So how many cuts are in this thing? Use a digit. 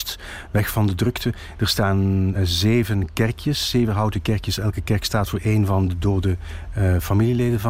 1